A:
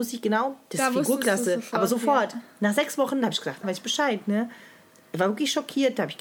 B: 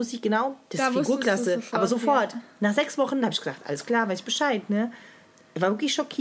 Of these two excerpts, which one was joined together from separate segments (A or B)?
A